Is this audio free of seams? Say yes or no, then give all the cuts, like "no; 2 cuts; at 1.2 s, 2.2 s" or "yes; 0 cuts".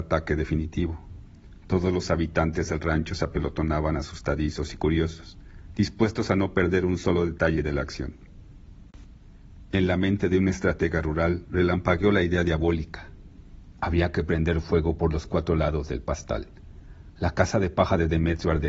yes; 0 cuts